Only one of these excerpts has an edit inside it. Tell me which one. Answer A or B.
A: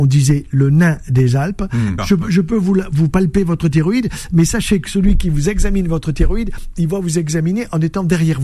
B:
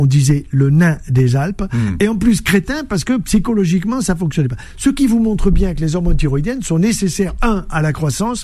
A